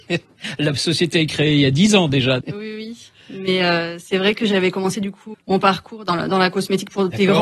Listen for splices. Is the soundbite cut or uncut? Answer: cut